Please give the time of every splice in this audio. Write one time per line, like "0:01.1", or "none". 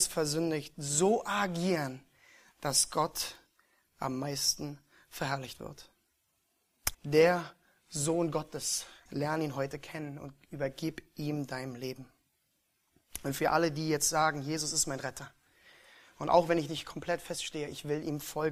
0:06.9
0:09.1